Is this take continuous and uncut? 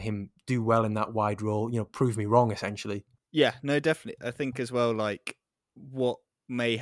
no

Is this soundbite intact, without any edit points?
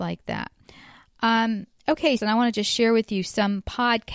no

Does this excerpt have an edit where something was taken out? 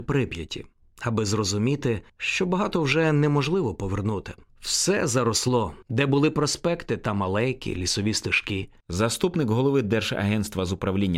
yes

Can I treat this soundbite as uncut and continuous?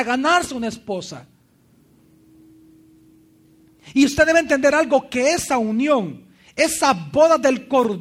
yes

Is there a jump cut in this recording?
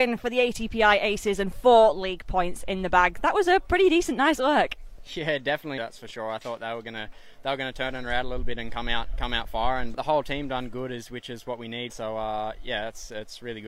yes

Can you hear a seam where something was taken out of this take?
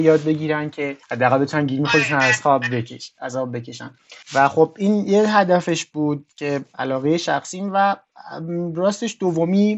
yes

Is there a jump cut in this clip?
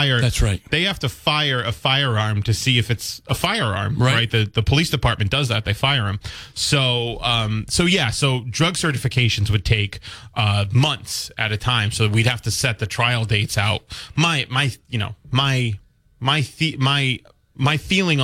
no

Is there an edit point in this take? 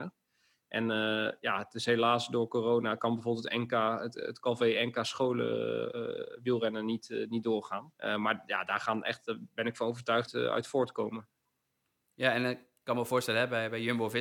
yes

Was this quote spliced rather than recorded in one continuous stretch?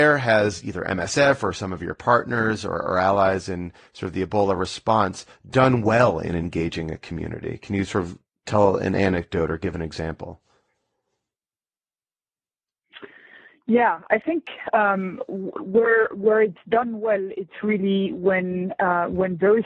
no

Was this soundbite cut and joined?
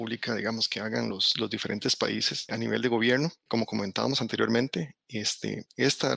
no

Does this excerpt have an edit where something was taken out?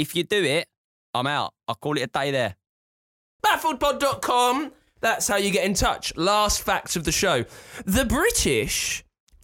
yes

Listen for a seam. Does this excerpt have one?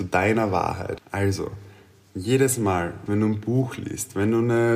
yes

